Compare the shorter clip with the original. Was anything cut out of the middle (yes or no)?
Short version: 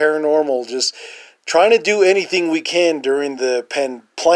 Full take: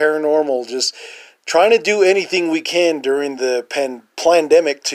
no